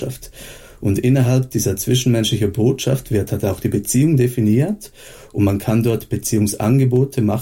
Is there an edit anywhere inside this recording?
no; 0 cuts

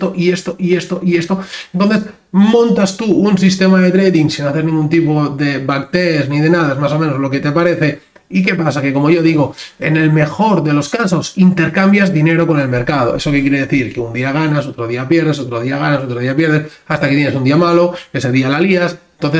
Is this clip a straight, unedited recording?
yes; 0 cuts

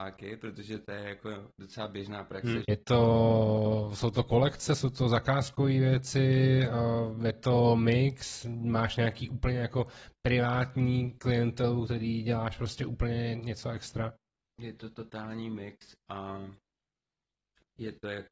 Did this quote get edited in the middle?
yes; 1 cut; at 2.6 s

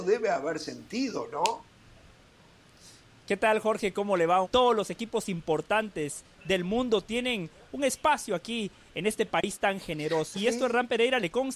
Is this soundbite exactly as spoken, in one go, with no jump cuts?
no; 2 cuts; at 4.4 s, 10.3 s

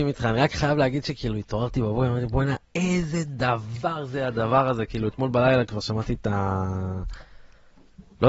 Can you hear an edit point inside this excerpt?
no; 0 cuts

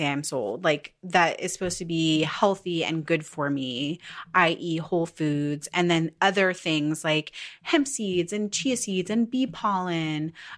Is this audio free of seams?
yes; 0 cuts

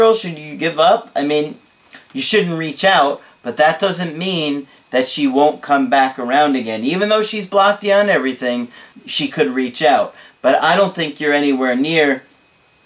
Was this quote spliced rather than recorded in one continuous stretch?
yes; 1 cut; at 8.9 s

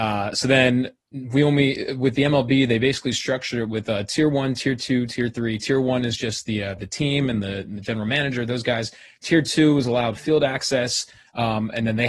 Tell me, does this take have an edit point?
no; 0 cuts

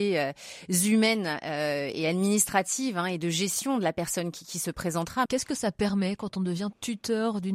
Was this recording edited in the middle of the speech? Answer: yes; 1 cut; at 5.3 s

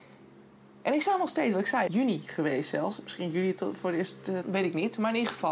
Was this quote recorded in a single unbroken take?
no; 2 cuts; at 1.9 s, 4.4 s

